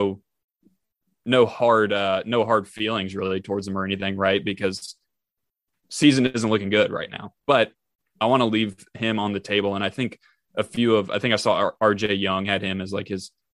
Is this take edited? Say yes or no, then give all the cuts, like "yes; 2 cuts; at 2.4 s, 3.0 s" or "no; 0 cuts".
no; 0 cuts